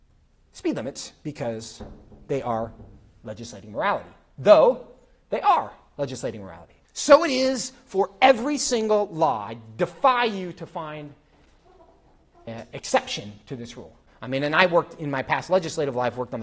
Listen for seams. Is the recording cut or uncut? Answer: cut